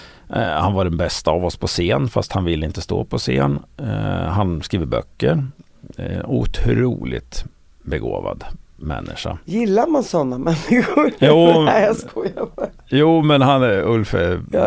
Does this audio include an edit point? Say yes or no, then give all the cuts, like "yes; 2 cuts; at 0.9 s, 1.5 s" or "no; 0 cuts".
no; 0 cuts